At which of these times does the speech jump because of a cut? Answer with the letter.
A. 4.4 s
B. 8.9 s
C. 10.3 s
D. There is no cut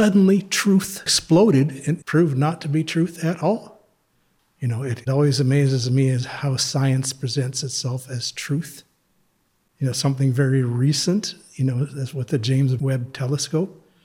A